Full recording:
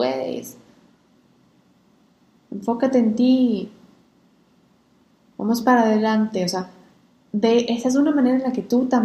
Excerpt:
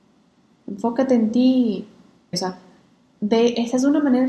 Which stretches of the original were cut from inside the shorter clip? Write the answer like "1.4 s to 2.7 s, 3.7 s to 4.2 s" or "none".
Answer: 4.2 s to 6.4 s